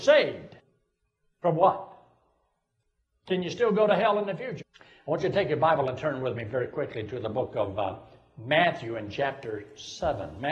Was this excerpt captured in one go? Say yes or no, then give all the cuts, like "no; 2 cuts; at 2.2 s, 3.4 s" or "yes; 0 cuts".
no; 1 cut; at 4.6 s